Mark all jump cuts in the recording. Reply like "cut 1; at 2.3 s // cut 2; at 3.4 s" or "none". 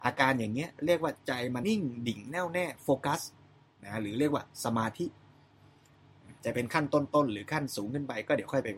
cut 1; at 1.6 s

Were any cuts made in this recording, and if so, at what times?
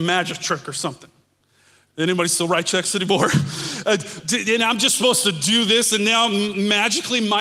cut 1; at 1.9 s

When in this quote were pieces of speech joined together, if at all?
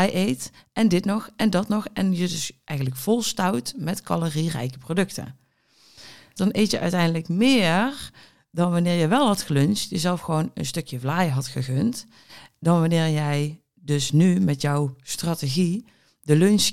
cut 1; at 6.4 s

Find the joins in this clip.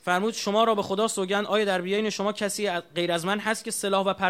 none

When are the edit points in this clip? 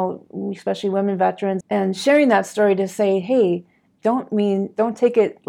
cut 1; at 1.6 s // cut 2; at 3.9 s

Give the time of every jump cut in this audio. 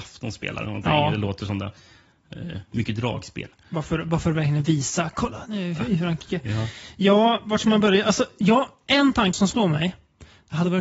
cut 1; at 9.3 s

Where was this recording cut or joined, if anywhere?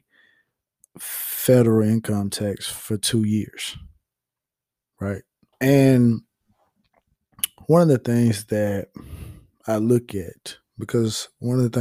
cut 1; at 5.5 s

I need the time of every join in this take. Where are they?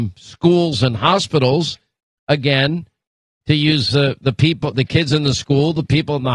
none

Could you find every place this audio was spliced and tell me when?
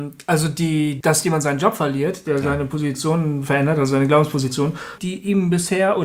cut 1; at 1.0 s // cut 2; at 5.0 s

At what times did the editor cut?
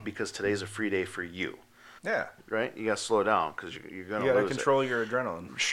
cut 1; at 2.0 s

